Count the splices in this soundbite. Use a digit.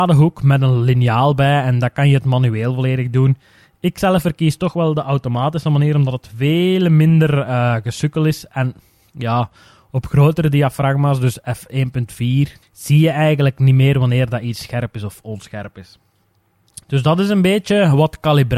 2